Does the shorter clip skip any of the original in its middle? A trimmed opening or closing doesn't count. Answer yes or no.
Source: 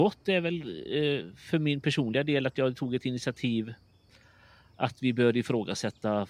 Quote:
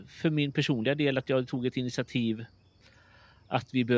no